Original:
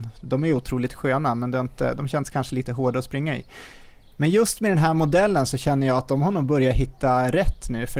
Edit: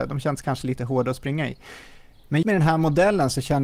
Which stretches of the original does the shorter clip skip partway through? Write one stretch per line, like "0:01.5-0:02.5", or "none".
0:04.3-0:04.6

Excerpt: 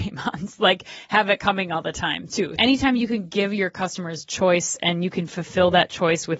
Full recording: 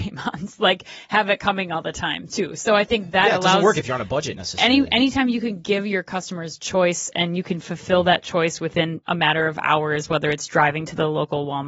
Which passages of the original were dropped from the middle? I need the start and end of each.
0:02.6-0:04.9

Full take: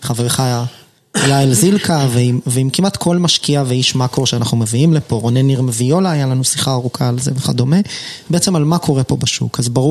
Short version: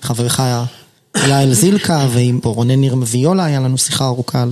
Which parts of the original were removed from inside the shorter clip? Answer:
0:02.4-0:05.1

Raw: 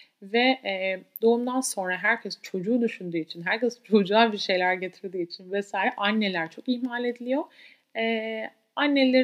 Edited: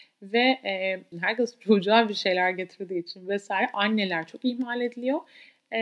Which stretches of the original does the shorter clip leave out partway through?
0:01.1-0:03.4

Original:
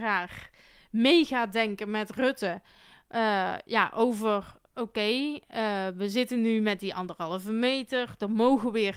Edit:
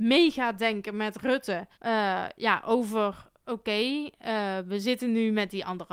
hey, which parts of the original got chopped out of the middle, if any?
0:02.7-0:03.0

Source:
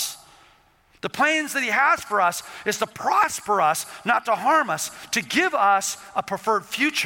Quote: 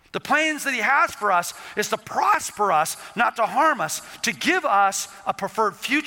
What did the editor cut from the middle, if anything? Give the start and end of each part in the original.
none

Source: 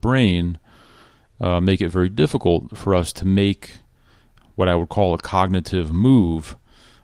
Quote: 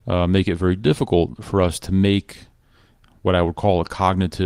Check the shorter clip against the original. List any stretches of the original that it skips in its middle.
none

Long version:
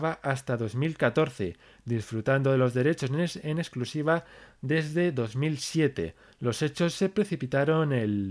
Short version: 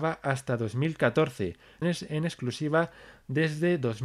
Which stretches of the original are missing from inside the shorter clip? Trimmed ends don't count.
0:01.8-0:03.2

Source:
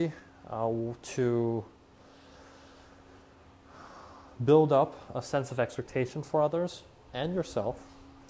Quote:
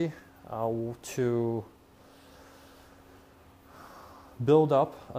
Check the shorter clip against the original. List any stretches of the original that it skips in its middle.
none

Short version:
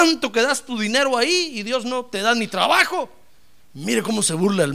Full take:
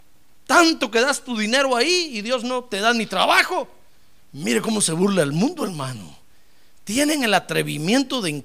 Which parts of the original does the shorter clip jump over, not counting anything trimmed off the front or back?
none

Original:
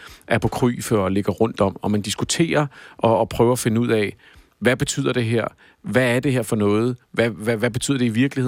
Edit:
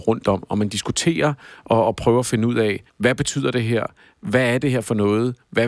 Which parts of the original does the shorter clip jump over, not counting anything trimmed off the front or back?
0:04.2-0:04.5

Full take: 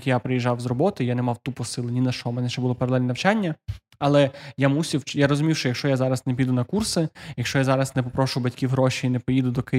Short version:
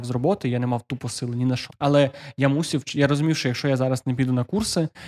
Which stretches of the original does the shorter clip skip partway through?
0:02.2-0:03.9

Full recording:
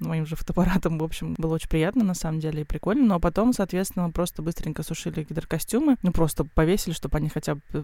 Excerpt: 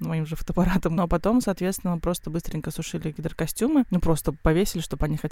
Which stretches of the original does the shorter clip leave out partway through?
0:01.0-0:03.1

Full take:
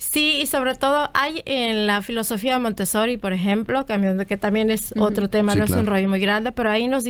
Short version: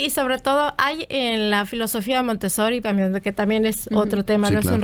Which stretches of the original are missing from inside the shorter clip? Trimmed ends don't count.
0:03.2-0:03.9

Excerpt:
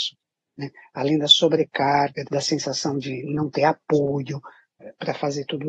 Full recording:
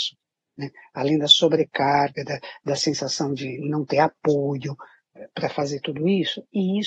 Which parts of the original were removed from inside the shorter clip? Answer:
0:02.2-0:02.6

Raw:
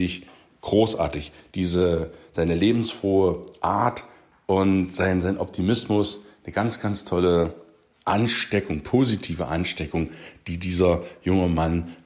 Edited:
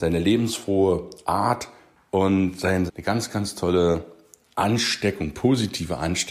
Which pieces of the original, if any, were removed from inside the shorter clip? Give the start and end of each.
0:05.2-0:06.4

